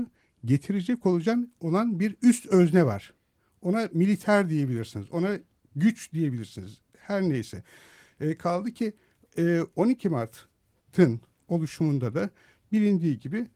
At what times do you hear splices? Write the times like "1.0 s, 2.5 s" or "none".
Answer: none